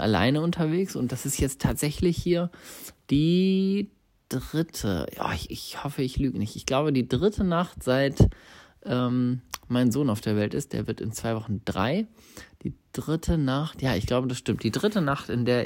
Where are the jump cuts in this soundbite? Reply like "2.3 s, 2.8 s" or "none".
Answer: none